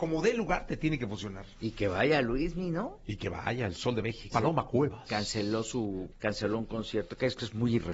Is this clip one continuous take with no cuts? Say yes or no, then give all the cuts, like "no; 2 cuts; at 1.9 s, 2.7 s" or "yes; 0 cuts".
no; 2 cuts; at 4.3 s, 6.1 s